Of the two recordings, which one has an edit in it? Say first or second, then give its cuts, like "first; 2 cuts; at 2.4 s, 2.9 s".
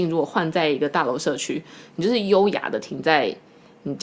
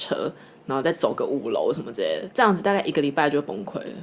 second; 1 cut; at 2.3 s